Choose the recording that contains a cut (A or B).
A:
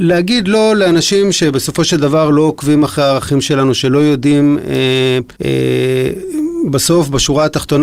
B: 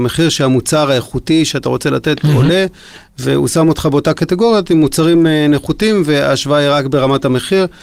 A